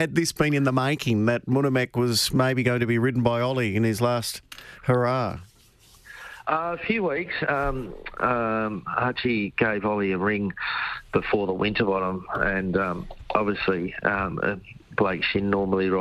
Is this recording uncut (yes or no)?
no